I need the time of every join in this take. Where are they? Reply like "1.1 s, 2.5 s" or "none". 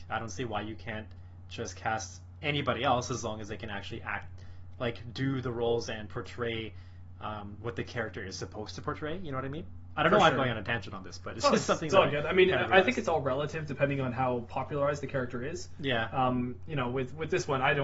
none